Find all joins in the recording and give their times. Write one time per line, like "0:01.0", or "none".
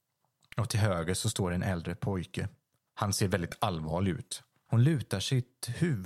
0:02.9
0:04.7

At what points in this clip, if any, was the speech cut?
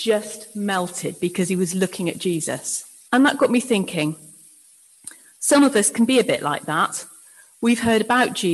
0:03.1

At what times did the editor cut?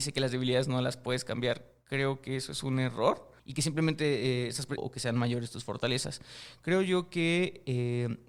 0:03.4
0:04.8

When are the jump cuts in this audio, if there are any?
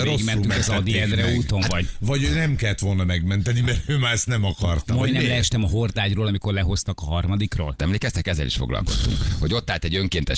0:07.8

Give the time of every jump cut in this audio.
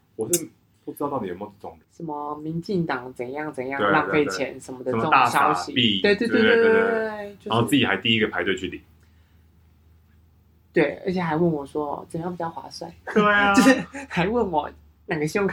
0:01.8

